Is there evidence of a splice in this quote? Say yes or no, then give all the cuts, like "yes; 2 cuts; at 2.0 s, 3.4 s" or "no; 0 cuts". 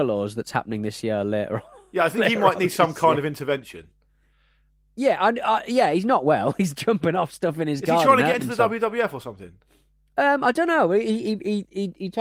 no; 0 cuts